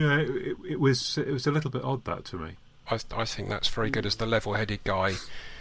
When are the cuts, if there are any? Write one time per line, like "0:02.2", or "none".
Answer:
0:02.9